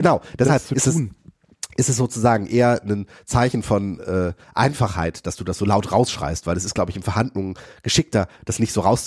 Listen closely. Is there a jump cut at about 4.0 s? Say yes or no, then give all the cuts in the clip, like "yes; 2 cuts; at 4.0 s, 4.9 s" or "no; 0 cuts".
no; 0 cuts